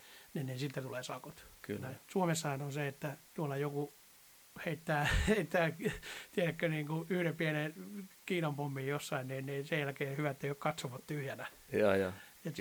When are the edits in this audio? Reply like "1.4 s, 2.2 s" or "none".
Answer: 3.3 s